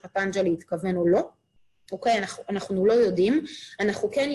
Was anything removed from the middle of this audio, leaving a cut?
no; 0 cuts

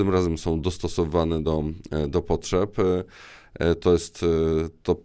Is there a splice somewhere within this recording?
no; 0 cuts

